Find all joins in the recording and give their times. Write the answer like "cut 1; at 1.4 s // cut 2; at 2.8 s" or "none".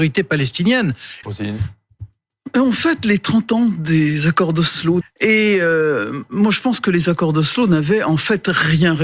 cut 1; at 1.2 s // cut 2; at 5.0 s